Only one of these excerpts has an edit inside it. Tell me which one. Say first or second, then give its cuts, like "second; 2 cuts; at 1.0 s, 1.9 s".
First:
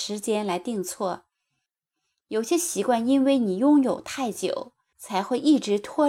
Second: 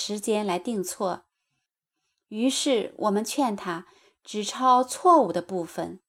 first; 2 cuts; at 2.2 s, 4.9 s